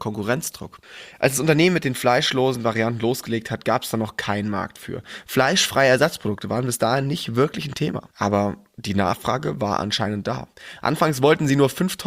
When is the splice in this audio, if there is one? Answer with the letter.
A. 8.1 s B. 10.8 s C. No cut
A